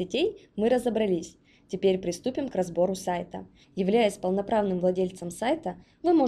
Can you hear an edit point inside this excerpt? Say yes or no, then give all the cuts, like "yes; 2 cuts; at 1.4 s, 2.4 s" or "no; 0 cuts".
yes; 1 cut; at 3.6 s